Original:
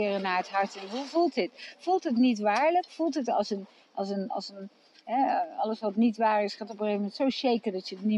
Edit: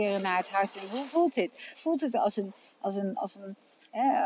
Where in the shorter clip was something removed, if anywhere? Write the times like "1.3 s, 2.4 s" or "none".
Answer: 1.7 s

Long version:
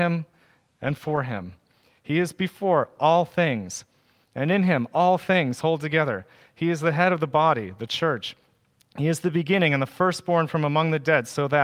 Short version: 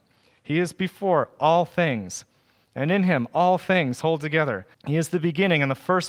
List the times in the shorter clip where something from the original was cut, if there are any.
4.7 s

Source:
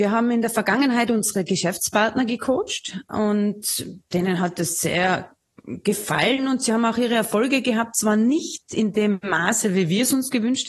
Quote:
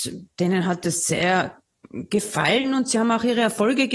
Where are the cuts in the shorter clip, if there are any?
none

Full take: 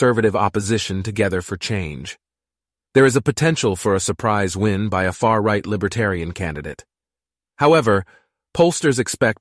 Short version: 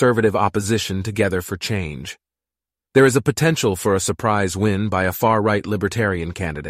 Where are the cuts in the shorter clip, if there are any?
none

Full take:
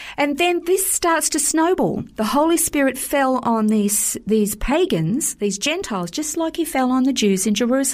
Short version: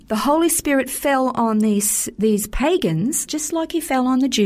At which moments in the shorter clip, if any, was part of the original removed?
3.3 s

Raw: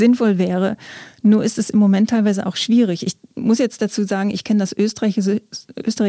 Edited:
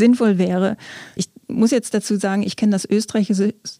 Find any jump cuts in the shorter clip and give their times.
1.2 s

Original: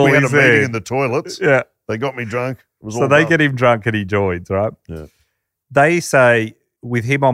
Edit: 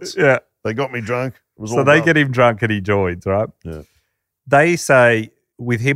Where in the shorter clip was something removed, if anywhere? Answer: none

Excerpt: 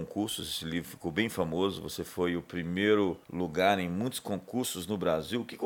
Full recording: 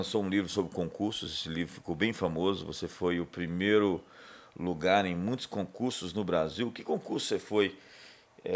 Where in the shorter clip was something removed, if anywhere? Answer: 3.2 s

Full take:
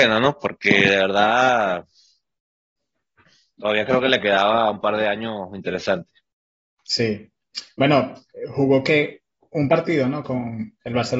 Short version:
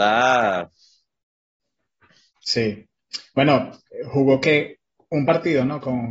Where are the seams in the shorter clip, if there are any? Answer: 2.3 s

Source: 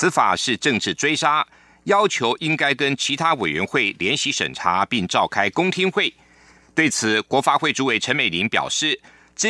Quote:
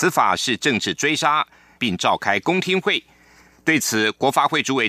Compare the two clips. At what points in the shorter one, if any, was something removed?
1.8 s

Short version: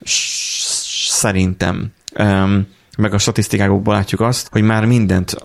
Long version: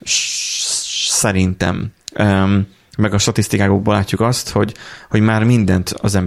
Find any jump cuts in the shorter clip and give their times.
4.4 s

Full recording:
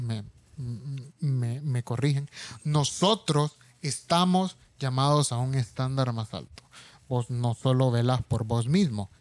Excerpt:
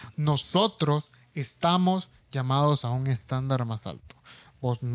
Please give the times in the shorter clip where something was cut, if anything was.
none

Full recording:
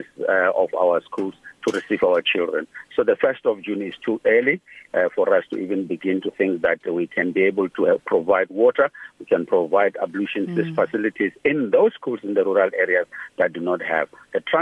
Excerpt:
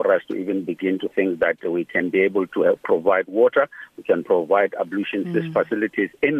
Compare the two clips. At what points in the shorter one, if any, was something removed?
none

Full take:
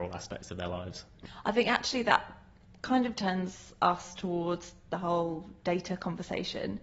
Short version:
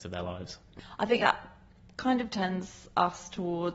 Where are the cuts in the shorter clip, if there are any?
1.2 s

